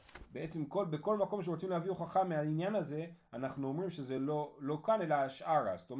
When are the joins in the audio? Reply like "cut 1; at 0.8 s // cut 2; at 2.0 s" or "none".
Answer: none